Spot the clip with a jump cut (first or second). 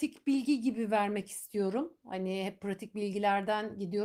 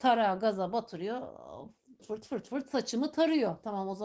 second